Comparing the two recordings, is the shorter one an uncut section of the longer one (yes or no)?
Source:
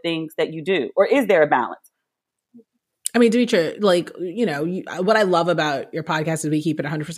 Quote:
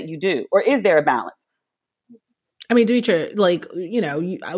yes